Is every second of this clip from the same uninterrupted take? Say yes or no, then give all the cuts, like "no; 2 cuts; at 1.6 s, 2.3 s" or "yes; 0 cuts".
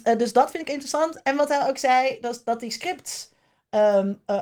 yes; 0 cuts